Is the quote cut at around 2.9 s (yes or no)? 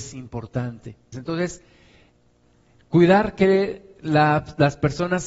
no